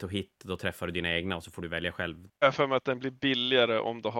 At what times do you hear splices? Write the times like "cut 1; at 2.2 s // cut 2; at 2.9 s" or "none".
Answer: cut 1; at 2.3 s